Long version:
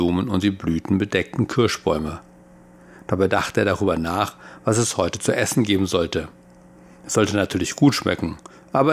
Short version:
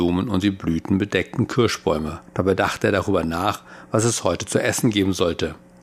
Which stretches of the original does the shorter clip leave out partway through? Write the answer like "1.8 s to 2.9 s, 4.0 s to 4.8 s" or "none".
2.3 s to 3.0 s